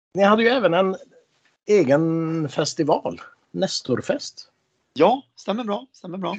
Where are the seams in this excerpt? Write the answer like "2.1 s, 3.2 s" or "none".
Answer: none